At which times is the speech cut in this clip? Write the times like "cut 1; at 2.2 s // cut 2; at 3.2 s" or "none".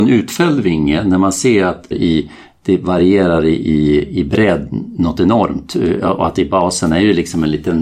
cut 1; at 1.9 s